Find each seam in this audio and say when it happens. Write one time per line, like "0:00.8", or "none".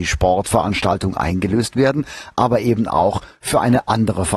none